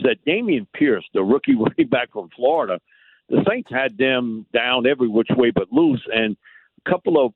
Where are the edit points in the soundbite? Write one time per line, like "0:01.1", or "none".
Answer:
none